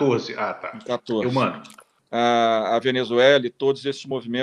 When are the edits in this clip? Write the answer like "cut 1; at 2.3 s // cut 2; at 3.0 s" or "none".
cut 1; at 2.0 s